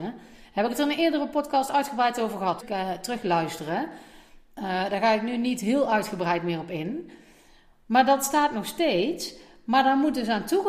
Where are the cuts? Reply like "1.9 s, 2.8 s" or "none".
2.6 s